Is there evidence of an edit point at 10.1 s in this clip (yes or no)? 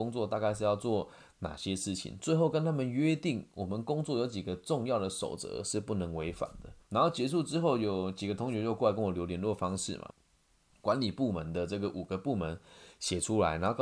yes